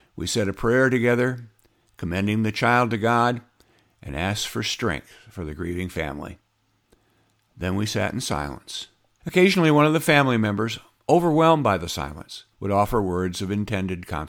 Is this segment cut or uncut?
cut